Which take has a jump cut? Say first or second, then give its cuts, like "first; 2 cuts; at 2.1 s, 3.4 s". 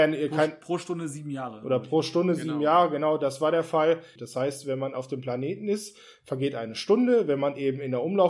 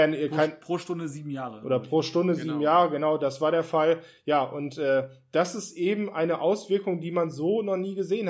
first; 1 cut; at 4.2 s